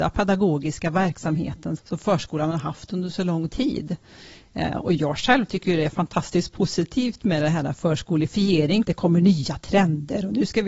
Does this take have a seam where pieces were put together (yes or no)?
yes